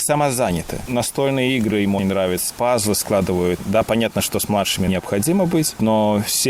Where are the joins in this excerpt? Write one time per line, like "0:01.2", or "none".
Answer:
0:02.0